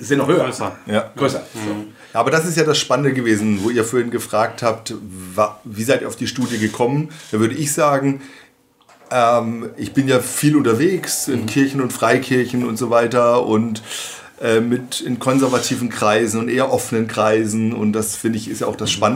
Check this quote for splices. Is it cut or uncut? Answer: uncut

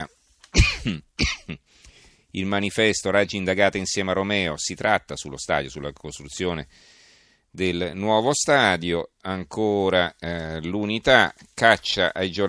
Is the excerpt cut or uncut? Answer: cut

